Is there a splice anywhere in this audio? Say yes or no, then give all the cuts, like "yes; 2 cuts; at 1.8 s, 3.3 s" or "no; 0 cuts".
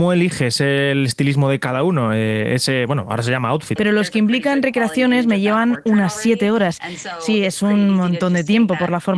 yes; 1 cut; at 3.8 s